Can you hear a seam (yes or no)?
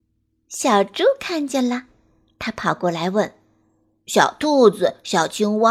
no